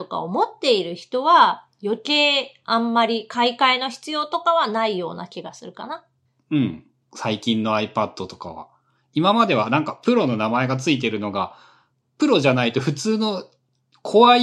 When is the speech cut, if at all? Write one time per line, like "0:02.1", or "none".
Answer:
0:07.0